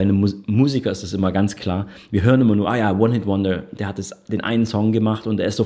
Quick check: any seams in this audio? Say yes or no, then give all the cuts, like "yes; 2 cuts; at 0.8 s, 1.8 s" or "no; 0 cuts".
no; 0 cuts